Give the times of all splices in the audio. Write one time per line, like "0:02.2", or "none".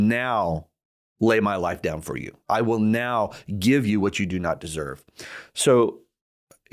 none